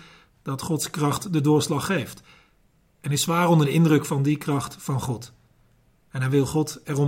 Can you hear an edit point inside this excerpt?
no; 0 cuts

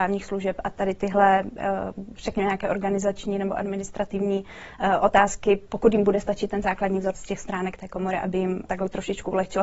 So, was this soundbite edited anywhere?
yes; 2 cuts; at 7.1 s, 8.7 s

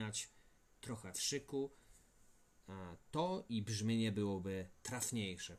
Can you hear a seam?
no; 0 cuts

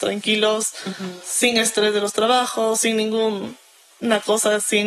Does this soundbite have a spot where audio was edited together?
no; 0 cuts

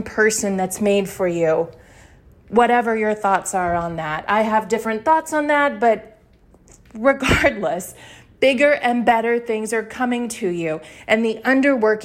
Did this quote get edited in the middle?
no; 0 cuts

